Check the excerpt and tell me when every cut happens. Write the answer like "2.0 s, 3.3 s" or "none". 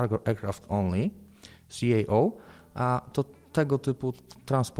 none